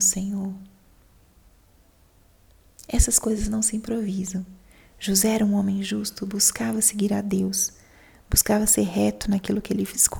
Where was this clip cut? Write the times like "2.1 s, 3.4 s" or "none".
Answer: none